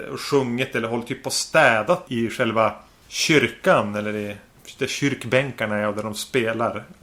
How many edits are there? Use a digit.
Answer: 1